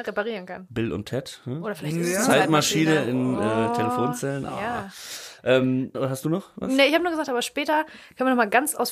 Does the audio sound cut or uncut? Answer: cut